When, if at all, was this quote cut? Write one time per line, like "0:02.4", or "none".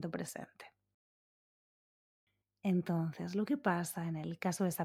0:02.4